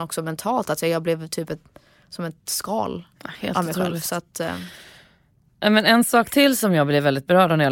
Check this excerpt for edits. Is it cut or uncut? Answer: uncut